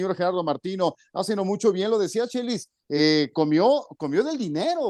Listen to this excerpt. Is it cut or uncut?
uncut